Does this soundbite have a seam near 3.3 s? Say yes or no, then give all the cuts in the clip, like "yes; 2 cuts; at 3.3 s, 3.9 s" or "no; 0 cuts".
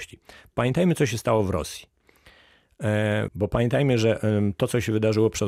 yes; 1 cut; at 3.3 s